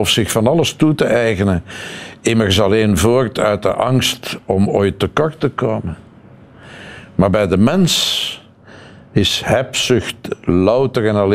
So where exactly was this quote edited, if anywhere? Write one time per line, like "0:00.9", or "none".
none